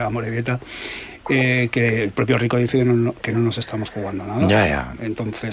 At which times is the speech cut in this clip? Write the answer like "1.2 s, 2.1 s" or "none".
none